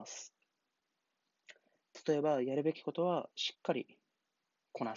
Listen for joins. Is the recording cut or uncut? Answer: uncut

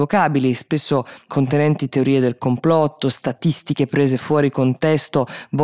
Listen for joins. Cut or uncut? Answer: uncut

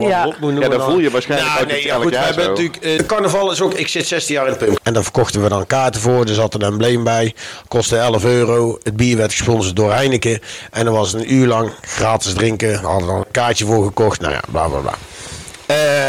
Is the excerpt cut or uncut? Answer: cut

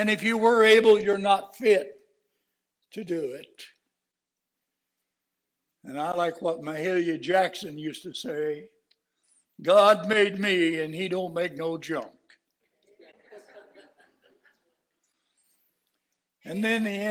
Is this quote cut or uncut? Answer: uncut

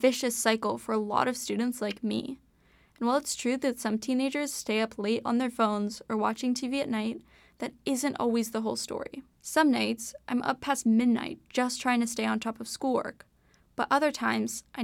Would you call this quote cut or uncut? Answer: cut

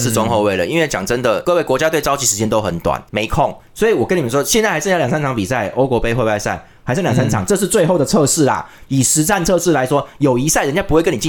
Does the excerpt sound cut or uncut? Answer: uncut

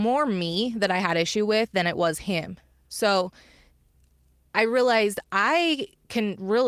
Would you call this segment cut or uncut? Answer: uncut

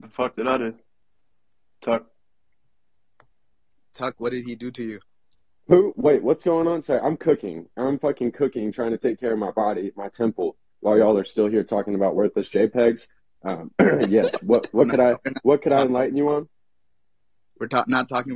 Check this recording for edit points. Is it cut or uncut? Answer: uncut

